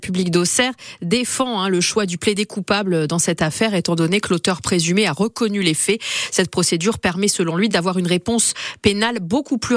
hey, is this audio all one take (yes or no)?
yes